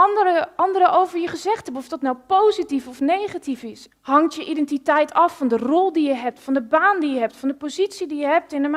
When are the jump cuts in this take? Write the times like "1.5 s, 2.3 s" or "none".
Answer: 3.9 s